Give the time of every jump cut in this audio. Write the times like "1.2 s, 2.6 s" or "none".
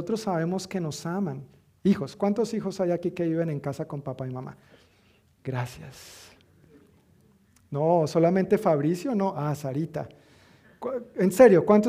none